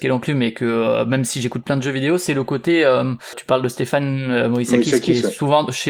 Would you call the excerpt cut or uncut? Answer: uncut